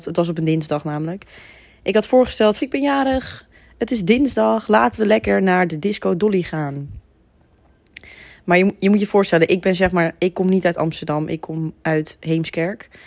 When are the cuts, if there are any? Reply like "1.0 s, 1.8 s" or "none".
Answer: 2.6 s